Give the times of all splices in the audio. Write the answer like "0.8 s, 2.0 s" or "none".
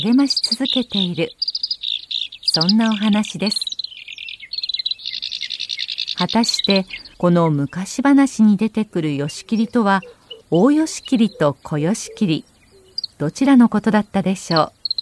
7.1 s, 10.4 s